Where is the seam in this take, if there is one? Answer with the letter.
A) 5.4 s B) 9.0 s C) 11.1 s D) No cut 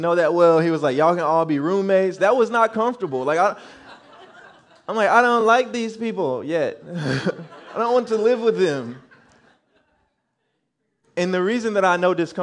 D